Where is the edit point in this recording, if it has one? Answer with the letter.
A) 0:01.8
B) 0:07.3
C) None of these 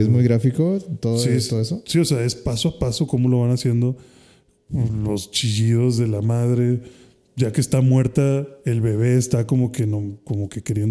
C